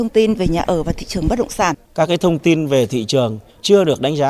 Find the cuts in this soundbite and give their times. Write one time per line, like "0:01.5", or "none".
0:01.9